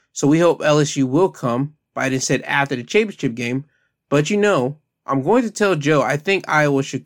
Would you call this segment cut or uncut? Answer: uncut